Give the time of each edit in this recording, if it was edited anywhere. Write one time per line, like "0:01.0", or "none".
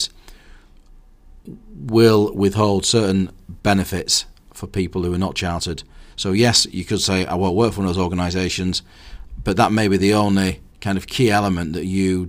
0:06.1
0:10.7